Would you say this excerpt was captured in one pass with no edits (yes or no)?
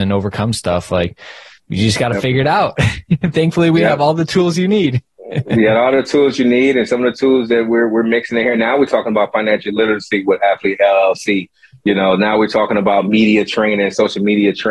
yes